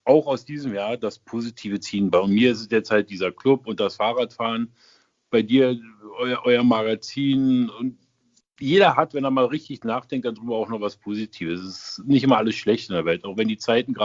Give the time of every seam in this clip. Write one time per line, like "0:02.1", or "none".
none